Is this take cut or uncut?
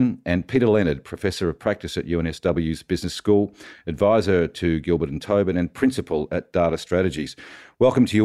uncut